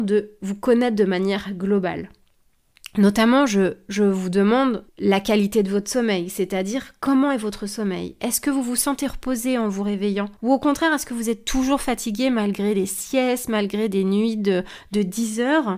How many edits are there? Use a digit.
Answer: 2